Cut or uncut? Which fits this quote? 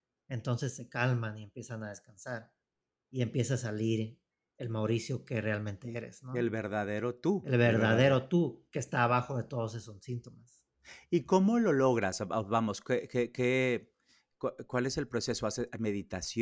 uncut